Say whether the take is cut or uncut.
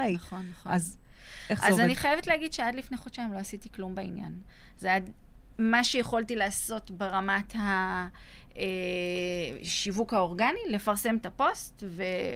uncut